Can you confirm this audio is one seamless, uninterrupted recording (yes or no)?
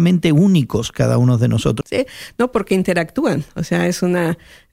no